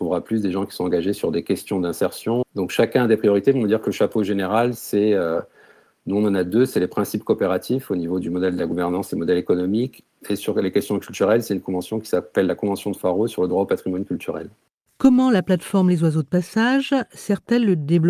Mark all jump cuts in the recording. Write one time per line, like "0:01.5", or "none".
0:02.4